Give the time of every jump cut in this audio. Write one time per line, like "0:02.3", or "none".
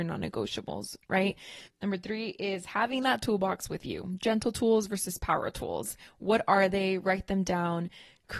0:01.7